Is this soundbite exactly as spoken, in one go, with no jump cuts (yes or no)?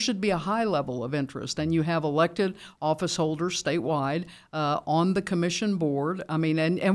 yes